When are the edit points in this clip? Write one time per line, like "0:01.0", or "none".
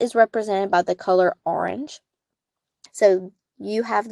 0:02.9